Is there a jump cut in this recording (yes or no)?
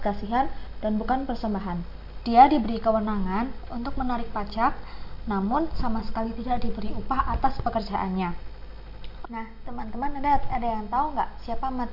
yes